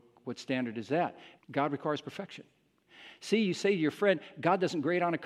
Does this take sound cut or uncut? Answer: cut